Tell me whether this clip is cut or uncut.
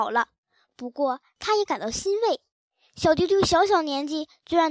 uncut